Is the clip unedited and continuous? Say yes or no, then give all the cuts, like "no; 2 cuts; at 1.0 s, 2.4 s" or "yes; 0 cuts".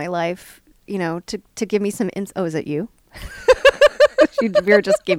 yes; 0 cuts